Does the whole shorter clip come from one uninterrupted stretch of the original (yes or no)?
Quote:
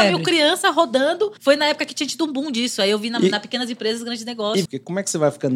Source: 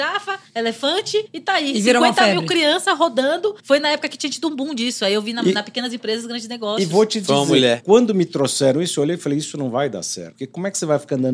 no